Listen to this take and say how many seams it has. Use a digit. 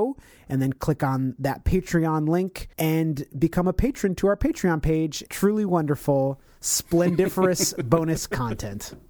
2